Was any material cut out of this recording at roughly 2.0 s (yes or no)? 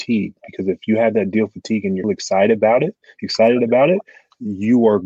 yes